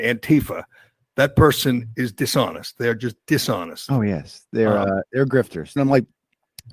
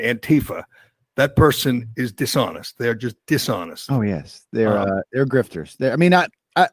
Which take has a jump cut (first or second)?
first